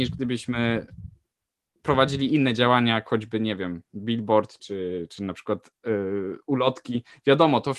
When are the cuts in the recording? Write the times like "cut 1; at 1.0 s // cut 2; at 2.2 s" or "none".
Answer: cut 1; at 4.6 s